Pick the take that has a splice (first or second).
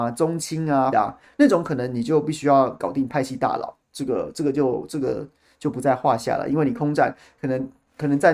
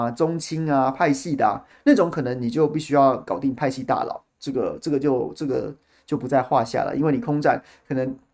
first